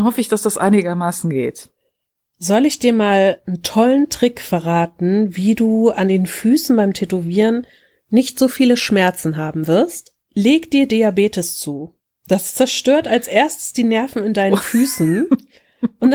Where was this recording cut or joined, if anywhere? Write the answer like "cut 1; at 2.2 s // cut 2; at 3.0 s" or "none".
cut 1; at 10.2 s